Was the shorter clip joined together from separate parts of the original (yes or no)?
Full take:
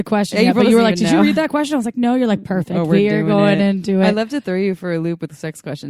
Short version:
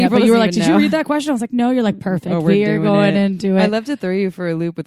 no